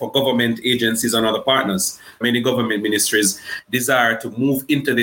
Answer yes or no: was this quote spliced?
yes